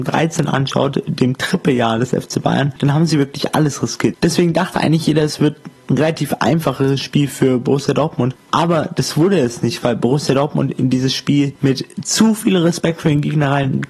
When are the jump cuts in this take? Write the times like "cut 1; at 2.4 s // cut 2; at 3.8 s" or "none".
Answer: cut 1; at 4.1 s